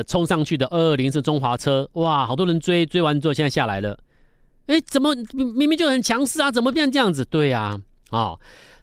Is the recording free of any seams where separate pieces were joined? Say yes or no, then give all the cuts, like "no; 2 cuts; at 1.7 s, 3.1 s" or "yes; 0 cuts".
yes; 0 cuts